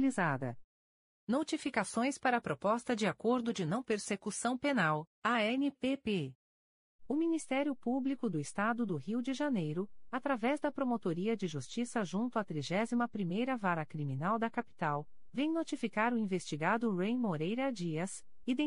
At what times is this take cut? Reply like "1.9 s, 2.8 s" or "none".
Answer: none